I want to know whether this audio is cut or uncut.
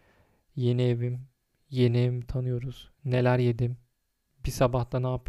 uncut